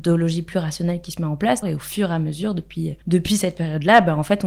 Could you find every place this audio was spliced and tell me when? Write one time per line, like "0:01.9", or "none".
0:01.6
0:03.0

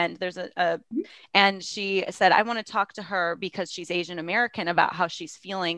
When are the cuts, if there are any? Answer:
0:00.9

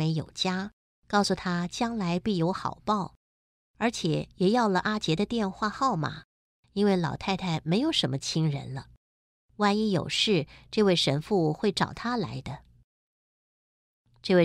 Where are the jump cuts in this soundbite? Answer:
none

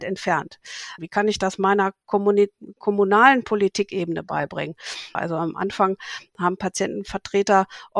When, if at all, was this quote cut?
0:01.0
0:05.1

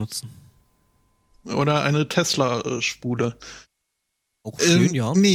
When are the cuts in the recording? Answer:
0:01.3

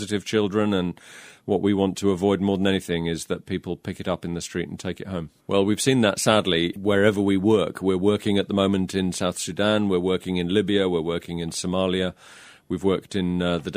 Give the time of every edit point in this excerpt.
0:05.4

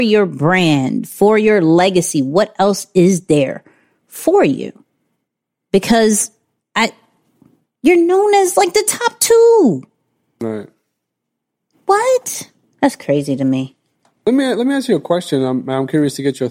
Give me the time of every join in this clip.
none

